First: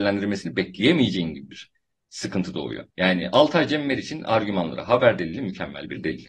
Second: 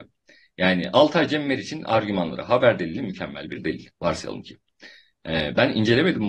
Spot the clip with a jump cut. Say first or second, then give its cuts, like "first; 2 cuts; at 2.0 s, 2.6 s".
first; 1 cut; at 2.9 s